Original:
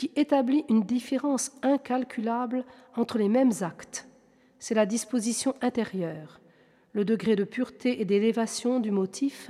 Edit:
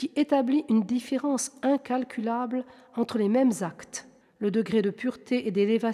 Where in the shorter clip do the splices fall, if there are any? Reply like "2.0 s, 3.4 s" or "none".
4.2 s